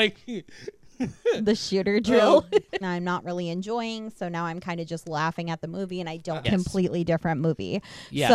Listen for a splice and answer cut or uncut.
cut